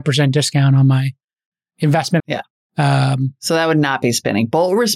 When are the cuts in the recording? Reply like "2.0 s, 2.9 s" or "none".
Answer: 2.2 s